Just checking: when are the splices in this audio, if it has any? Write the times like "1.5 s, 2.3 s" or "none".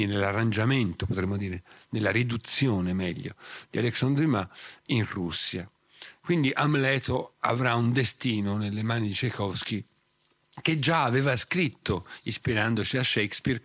none